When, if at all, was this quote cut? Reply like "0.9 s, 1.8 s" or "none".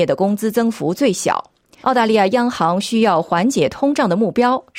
1.8 s